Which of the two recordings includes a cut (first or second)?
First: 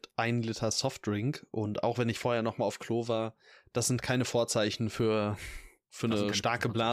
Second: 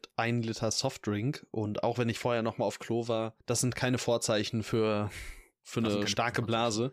second